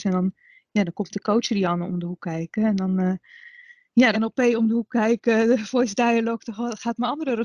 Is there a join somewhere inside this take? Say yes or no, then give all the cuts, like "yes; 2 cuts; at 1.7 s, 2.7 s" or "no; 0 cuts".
yes; 1 cut; at 4.1 s